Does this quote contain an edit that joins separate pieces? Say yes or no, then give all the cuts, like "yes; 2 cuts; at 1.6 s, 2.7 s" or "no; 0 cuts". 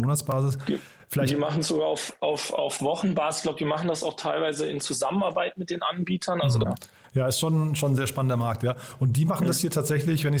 yes; 1 cut; at 6.6 s